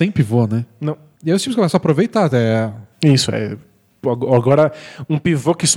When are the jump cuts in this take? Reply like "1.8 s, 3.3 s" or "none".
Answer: 1.1 s, 2.9 s